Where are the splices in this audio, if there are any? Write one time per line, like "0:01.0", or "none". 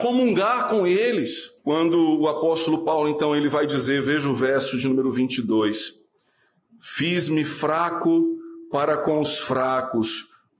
0:01.6